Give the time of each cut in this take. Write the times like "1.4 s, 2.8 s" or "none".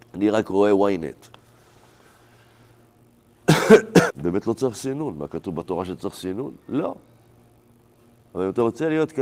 4.1 s